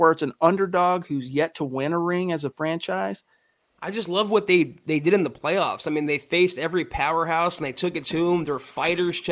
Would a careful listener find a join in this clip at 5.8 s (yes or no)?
no